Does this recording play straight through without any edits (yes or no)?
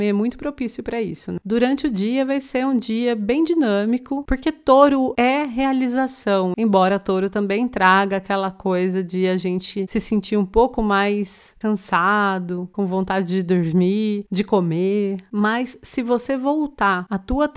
no